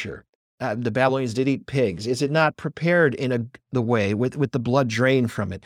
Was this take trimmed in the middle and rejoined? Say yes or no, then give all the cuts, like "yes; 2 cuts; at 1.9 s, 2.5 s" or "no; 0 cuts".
no; 0 cuts